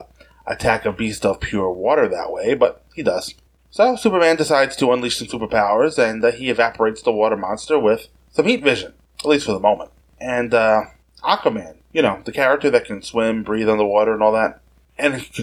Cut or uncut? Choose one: uncut